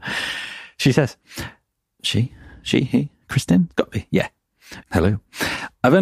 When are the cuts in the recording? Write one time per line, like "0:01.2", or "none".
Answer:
0:04.8